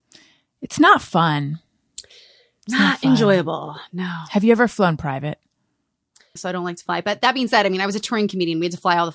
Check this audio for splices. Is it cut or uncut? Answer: cut